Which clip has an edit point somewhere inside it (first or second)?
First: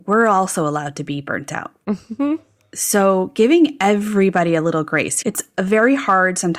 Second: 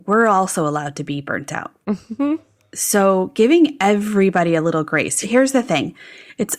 first